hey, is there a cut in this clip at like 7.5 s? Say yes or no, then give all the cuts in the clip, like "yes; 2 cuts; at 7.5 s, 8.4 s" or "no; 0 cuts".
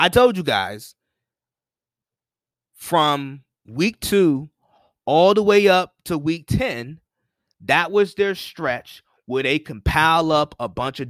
yes; 2 cuts; at 3.6 s, 7.5 s